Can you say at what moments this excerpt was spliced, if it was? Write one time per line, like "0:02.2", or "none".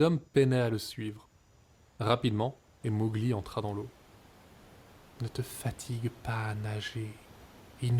0:02.8